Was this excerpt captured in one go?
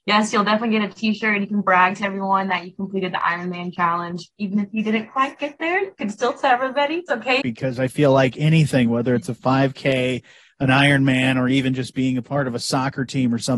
no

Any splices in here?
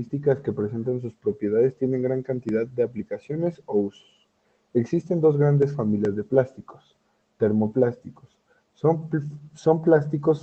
no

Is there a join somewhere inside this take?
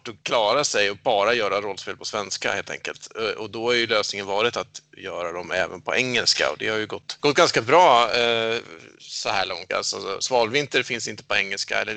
yes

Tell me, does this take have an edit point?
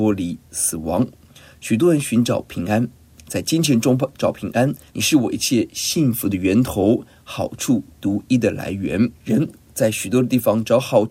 yes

